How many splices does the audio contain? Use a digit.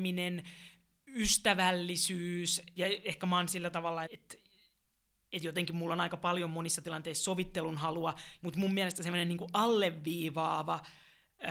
3